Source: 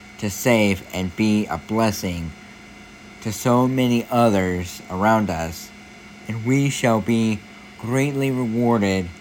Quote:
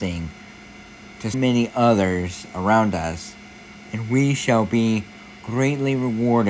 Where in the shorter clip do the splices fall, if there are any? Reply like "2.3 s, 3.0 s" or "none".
1.3 s